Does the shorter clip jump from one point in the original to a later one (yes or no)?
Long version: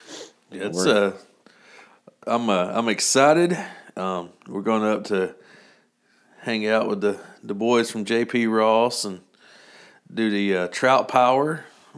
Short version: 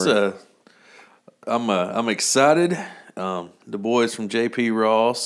yes